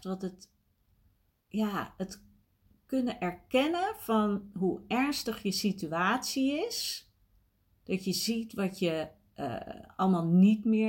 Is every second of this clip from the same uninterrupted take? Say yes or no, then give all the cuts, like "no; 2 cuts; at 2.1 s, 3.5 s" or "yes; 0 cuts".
yes; 0 cuts